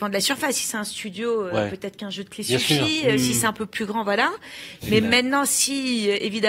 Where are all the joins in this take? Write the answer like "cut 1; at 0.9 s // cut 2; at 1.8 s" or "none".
none